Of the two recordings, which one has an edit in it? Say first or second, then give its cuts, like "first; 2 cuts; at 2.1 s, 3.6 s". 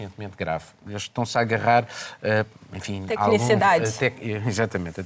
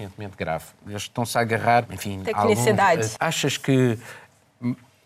second; 2 cuts; at 1.8 s, 3.2 s